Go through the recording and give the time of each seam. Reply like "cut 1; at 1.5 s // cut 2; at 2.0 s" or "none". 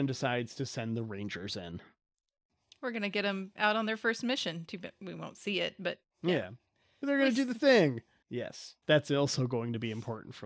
cut 1; at 6.1 s // cut 2; at 8.2 s